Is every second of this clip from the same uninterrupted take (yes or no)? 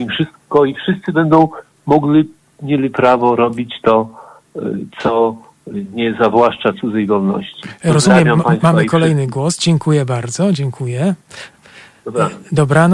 yes